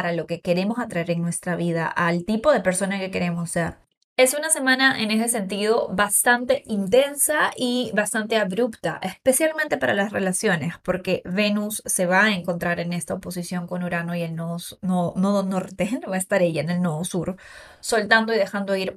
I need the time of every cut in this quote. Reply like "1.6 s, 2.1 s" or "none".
none